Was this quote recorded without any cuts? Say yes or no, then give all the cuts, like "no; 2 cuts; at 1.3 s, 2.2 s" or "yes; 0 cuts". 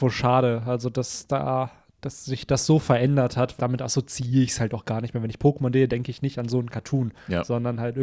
no; 1 cut; at 3.6 s